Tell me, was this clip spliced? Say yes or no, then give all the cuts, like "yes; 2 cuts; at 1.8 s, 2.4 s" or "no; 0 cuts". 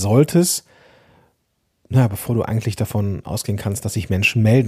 no; 0 cuts